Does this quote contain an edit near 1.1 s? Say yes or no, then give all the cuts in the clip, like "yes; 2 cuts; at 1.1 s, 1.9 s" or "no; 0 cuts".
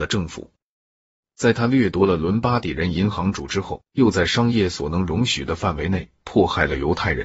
no; 1 cut; at 3.9 s